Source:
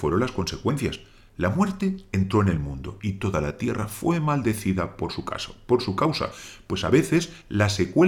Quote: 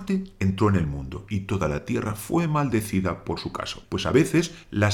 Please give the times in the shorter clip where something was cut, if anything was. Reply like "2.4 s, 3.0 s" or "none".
3.8 s